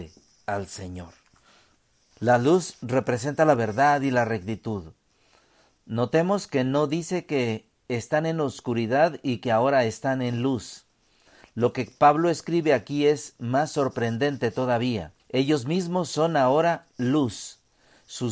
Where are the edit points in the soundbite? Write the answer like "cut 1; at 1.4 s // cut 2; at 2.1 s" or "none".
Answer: cut 1; at 2.1 s // cut 2; at 15.2 s